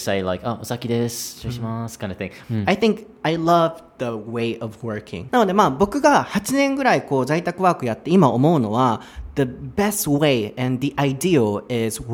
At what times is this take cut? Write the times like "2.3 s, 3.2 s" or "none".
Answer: 2.4 s, 5.3 s